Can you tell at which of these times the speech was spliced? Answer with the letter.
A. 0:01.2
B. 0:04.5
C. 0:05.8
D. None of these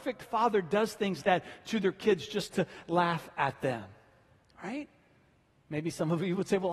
A